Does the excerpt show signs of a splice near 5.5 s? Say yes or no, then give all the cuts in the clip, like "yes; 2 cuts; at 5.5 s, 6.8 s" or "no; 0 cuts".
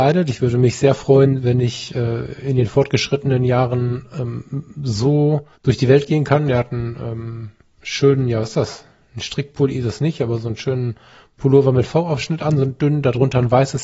yes; 1 cut; at 5.5 s